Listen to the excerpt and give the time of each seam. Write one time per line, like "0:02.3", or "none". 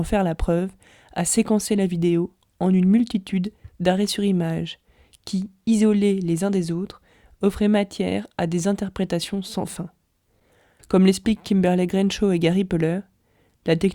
0:10.8

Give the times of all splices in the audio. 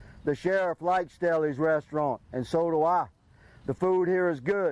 none

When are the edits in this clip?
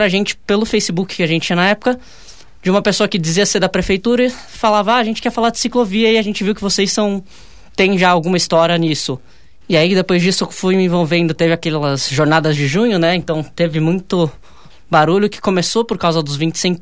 0:09.6

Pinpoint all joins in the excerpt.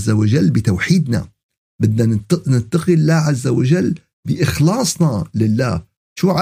none

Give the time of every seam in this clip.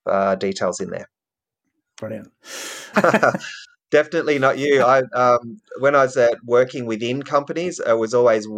0:02.9

